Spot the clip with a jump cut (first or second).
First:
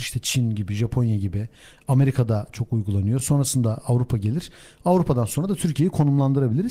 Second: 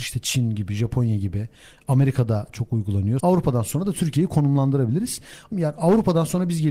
second